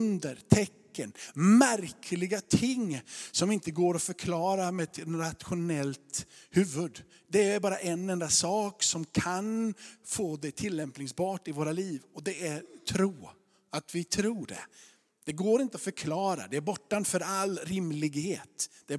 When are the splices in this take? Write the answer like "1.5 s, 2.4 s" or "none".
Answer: none